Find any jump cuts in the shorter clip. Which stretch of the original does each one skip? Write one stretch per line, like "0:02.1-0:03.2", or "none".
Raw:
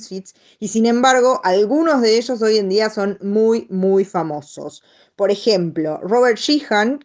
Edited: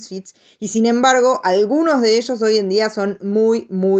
none